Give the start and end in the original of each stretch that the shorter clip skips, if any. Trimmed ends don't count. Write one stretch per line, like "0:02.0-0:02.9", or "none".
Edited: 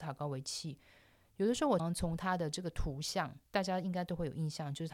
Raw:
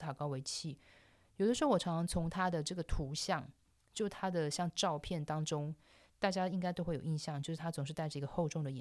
0:01.8-0:01.9
0:03.6-0:06.1